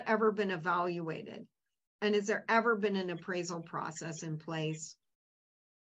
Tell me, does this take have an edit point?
no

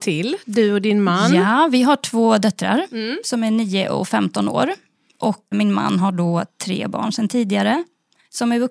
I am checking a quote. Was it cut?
yes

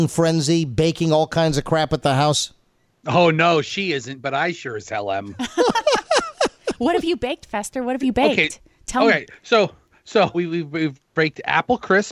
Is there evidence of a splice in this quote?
yes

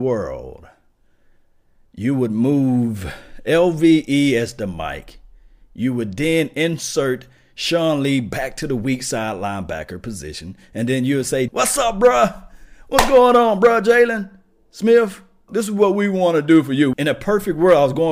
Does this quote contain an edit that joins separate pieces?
yes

